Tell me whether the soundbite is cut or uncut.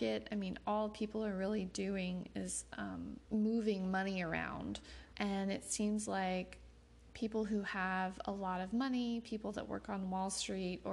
cut